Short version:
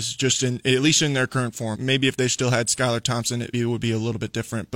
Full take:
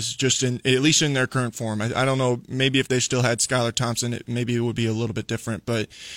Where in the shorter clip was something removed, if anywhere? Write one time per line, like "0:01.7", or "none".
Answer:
0:01.7
0:03.5